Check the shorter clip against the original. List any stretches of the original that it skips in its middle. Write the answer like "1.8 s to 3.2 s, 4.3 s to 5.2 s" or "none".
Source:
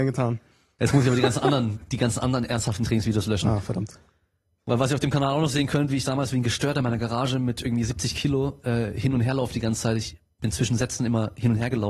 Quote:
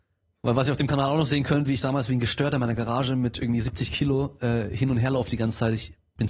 none